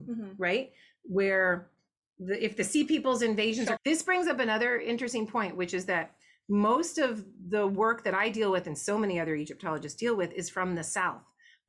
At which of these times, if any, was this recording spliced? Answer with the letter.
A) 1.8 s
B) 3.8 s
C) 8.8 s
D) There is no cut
B